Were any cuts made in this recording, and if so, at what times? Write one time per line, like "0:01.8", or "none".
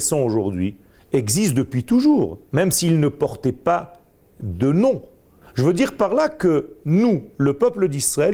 0:05.4